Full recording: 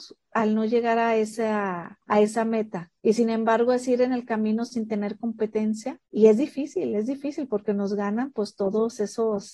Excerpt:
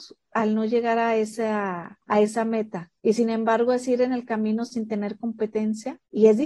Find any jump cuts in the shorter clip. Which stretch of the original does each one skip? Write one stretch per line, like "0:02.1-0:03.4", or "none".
none